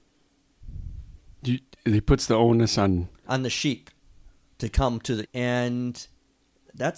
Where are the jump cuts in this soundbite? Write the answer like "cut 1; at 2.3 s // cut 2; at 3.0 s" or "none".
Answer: cut 1; at 5.2 s